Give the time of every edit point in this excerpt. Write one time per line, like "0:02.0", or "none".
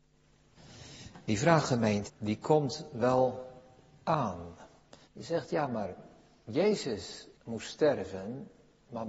0:02.1
0:05.0
0:07.3

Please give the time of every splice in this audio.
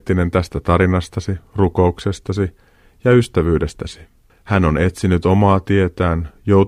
0:04.3

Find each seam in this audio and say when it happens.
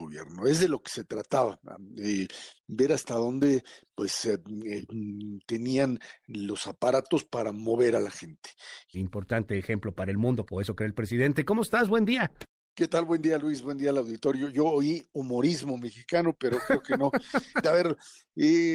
0:08.9
0:10.5
0:17.6

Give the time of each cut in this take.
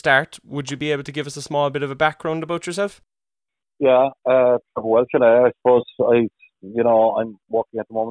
none

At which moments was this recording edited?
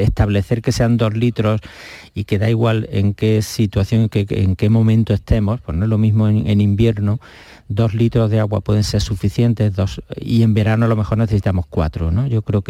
none

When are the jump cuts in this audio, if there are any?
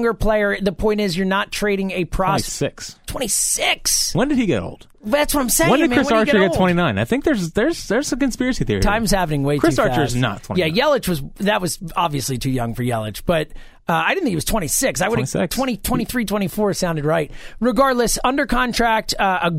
none

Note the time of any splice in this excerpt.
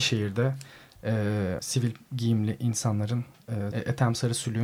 0:01.6
0:03.7

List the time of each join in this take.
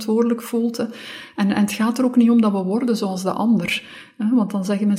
none

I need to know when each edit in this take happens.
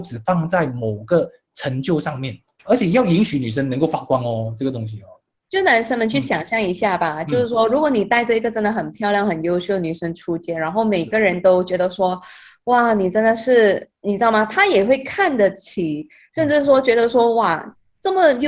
0:02.6

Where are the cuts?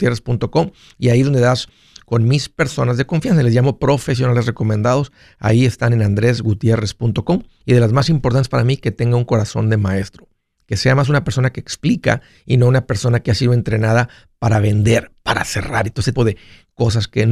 0:07.6
0:16.2

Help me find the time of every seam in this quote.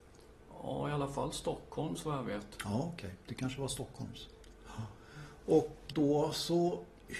0:05.9

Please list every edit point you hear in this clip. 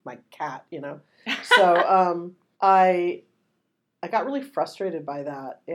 0:02.5

